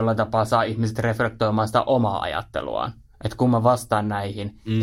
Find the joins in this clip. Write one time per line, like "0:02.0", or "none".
none